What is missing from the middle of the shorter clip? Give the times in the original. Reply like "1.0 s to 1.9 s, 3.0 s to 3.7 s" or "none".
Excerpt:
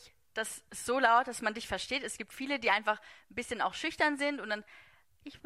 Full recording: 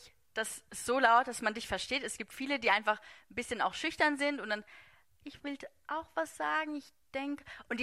none